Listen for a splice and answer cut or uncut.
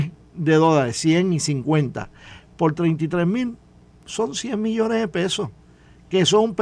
cut